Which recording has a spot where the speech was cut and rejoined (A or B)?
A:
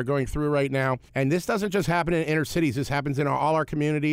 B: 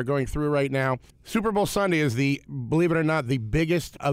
A